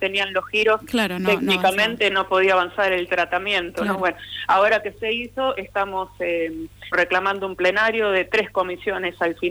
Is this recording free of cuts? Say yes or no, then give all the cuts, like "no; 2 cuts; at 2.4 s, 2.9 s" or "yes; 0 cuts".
no; 1 cut; at 6.9 s